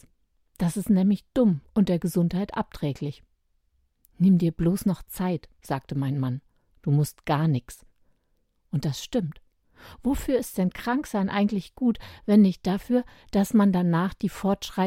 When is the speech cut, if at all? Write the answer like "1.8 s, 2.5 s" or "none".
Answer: none